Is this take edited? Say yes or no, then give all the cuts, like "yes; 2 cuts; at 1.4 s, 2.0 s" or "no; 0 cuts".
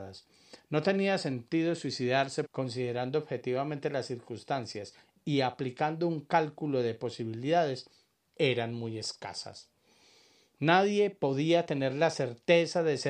yes; 1 cut; at 2.5 s